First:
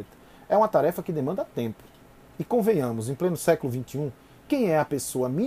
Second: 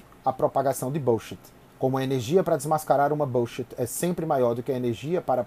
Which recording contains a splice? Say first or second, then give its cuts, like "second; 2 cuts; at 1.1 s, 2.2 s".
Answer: second; 1 cut; at 1.7 s